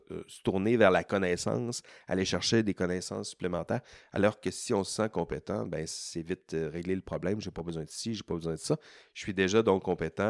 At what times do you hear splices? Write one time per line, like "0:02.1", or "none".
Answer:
none